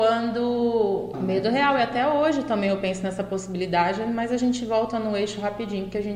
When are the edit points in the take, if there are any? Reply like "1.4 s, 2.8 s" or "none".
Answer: 1.1 s